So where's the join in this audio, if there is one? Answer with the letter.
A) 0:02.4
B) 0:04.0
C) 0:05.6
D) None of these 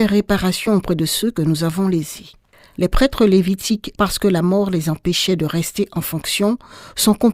B